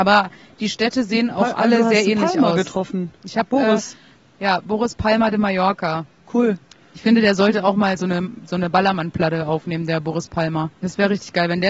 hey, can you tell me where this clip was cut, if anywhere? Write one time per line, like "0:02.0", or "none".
0:10.8